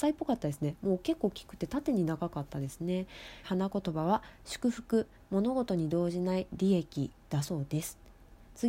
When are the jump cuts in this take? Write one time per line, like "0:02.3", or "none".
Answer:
0:03.4